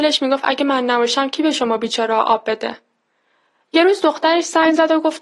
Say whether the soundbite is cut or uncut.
uncut